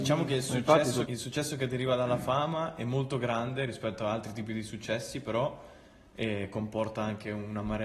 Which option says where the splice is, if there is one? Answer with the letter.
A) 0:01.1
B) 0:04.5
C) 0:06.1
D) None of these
A